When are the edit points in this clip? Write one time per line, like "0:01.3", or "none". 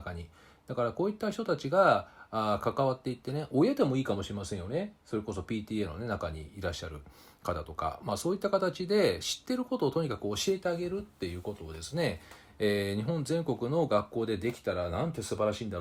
none